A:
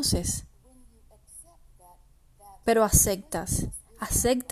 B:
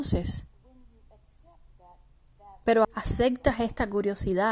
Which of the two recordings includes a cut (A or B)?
B